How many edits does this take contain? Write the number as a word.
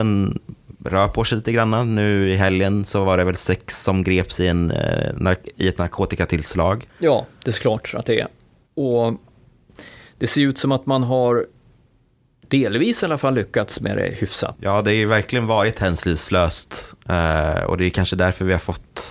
two